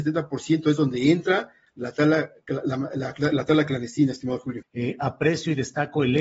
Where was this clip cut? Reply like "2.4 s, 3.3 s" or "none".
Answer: 4.6 s